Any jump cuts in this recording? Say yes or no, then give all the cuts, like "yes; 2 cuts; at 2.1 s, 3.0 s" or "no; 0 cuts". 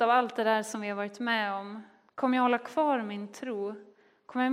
yes; 1 cut; at 2.1 s